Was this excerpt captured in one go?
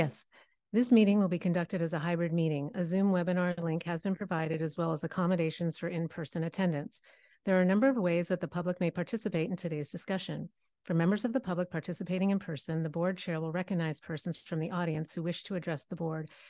yes; 0 cuts

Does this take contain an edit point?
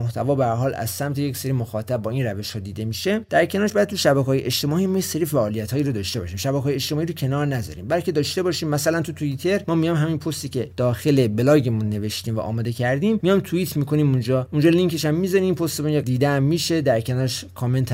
no; 0 cuts

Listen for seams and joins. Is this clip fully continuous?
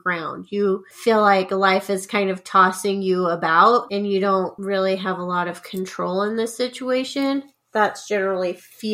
yes; 0 cuts

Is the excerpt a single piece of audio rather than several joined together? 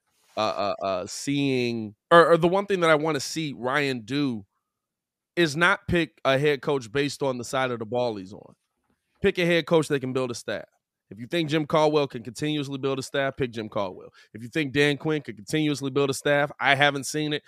no; 1 cut; at 2.0 s

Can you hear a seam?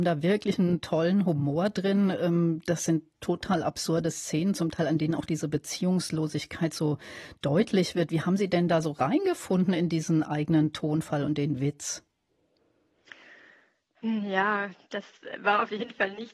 no; 0 cuts

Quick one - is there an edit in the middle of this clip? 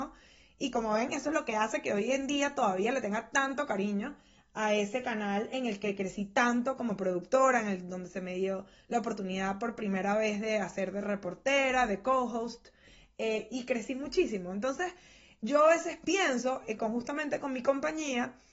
no; 0 cuts

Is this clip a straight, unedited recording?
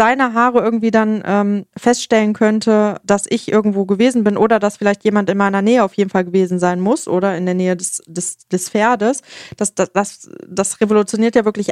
yes; 0 cuts

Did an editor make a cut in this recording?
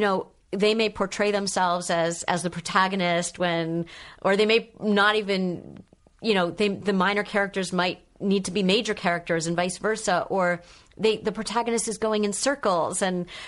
no; 0 cuts

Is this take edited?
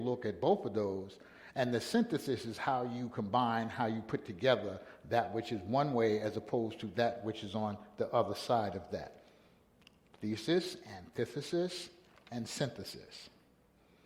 no; 0 cuts

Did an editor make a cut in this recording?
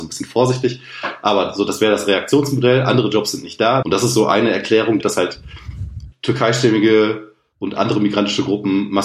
yes; 3 cuts; at 3.8 s, 5.0 s, 6.1 s

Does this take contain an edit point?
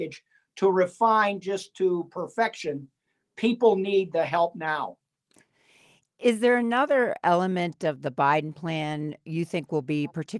no; 0 cuts

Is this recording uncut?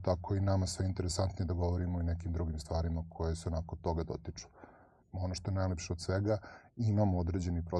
no; 1 cut; at 5.0 s

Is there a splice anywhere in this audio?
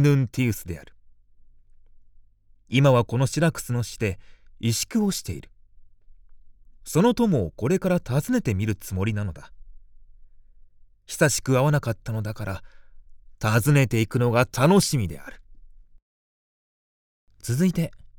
no; 0 cuts

